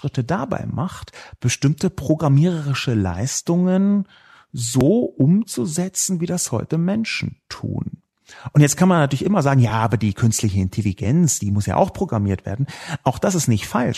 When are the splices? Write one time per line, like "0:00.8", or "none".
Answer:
none